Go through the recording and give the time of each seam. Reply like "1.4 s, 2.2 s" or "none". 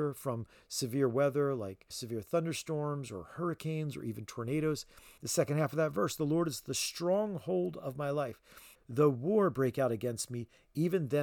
1.9 s, 5.2 s, 8.8 s